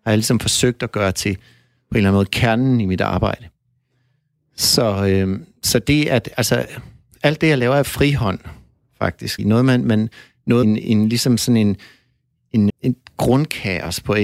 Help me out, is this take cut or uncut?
cut